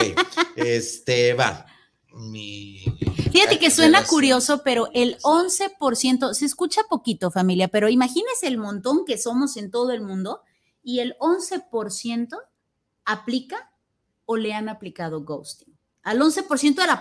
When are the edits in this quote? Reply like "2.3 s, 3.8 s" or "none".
none